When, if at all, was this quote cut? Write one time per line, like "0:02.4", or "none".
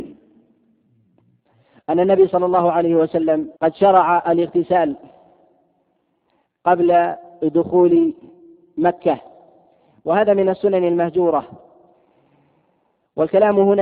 0:03.6